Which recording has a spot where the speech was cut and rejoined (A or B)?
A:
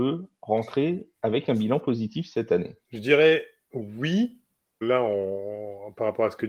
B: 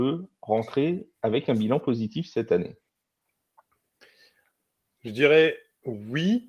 A